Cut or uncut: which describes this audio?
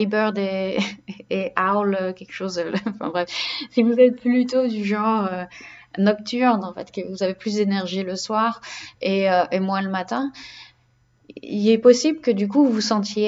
uncut